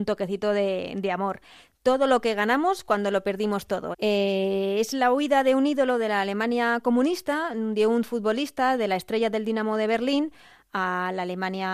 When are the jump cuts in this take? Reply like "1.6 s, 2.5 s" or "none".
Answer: 3.9 s